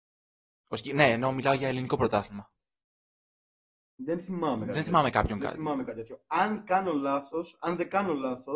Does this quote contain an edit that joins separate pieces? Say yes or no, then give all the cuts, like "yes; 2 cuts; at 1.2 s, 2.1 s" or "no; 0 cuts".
no; 0 cuts